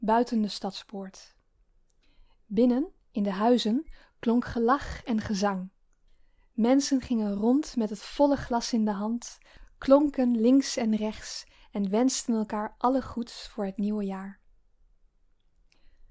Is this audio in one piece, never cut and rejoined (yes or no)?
yes